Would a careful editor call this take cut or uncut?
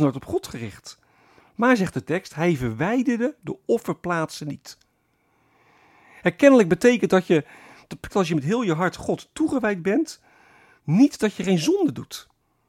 cut